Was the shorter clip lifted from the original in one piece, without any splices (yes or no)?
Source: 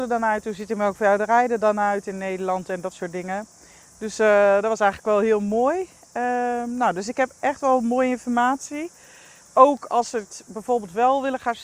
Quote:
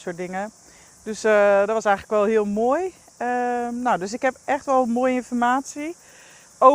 yes